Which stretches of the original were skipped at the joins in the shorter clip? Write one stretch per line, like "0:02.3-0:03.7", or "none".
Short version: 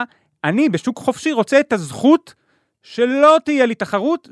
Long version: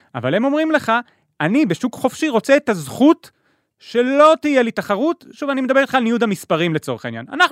none